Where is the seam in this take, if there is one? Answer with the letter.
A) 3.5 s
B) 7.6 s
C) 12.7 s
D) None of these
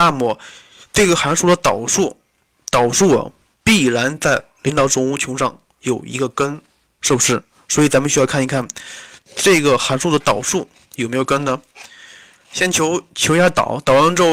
D